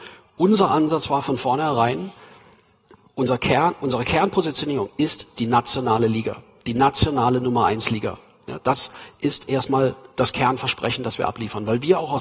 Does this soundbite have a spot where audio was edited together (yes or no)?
no